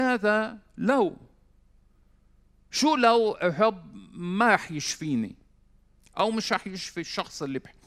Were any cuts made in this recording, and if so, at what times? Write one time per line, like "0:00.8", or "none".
none